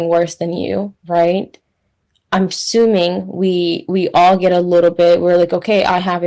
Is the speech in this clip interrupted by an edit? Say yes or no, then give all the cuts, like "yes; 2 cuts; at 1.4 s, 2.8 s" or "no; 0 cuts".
no; 0 cuts